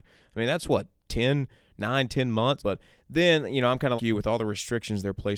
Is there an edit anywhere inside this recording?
yes; 2 cuts; at 2.6 s, 4.0 s

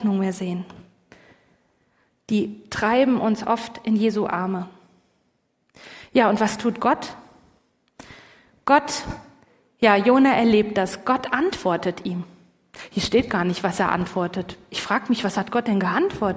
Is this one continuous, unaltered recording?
yes; 0 cuts

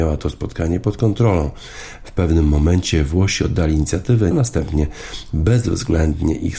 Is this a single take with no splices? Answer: no; 1 cut; at 4.3 s

